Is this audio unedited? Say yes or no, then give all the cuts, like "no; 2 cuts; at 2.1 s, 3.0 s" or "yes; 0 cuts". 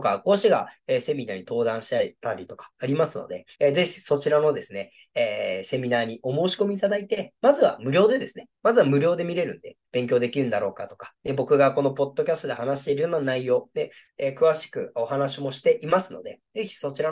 no; 2 cuts; at 3.5 s, 9.8 s